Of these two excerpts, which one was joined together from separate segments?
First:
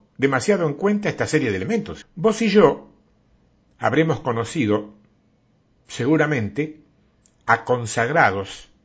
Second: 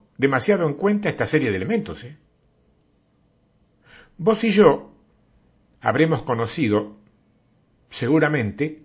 first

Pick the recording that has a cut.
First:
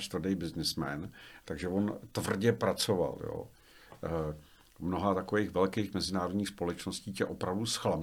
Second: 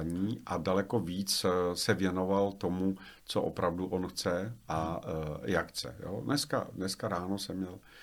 first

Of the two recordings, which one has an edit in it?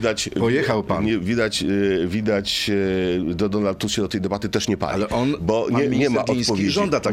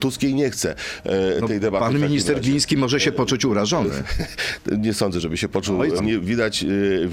second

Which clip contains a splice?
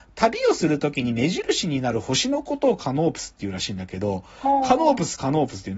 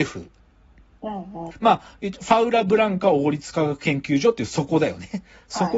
second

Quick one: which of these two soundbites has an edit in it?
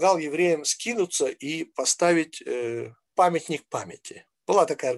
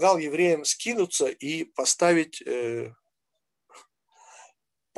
first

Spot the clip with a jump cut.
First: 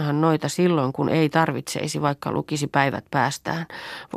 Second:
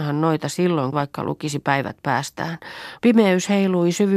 second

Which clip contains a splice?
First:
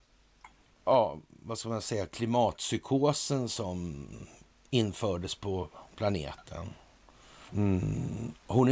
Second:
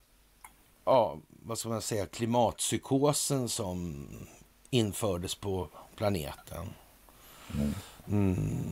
first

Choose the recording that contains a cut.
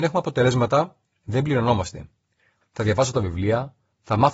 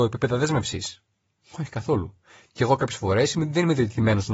first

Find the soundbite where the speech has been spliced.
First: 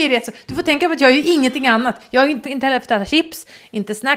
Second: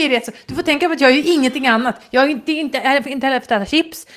first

